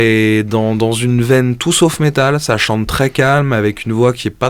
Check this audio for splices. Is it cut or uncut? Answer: uncut